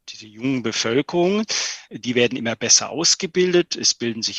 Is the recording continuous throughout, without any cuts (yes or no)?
yes